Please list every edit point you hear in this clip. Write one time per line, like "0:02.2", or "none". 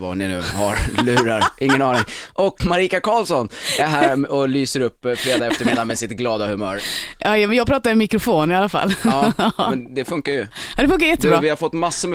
0:02.6